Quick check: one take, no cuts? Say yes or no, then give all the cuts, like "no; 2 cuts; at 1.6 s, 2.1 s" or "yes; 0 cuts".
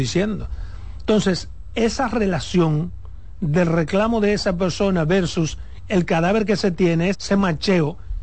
no; 2 cuts; at 1.0 s, 7.1 s